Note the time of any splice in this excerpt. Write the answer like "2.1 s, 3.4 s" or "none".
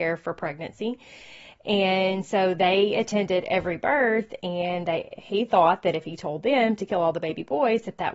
none